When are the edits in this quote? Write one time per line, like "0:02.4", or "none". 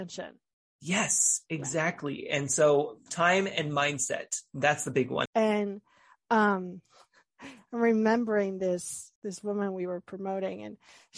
0:05.3
0:09.2